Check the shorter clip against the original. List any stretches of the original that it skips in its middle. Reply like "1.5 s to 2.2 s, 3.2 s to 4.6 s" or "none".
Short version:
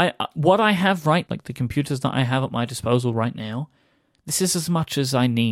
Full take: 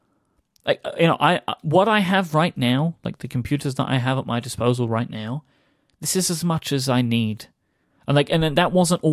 2.5 s to 3.0 s